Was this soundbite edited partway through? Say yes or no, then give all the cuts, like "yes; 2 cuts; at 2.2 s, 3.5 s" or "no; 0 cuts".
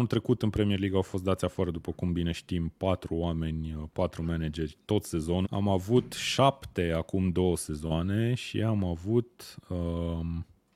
yes; 1 cut; at 5.4 s